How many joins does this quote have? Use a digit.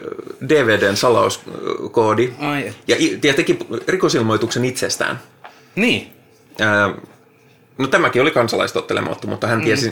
0